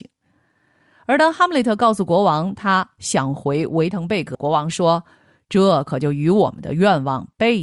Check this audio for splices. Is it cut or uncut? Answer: cut